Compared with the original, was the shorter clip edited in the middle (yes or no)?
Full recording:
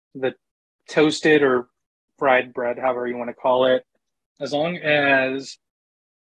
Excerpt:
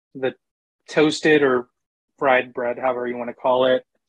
no